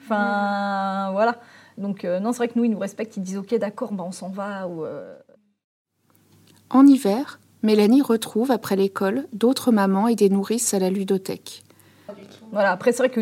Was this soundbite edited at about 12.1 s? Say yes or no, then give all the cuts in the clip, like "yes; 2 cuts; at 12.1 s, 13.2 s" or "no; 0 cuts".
yes; 1 cut; at 12.1 s